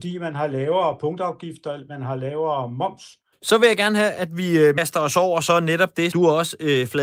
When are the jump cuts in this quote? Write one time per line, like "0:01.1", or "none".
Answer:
0:03.3
0:06.1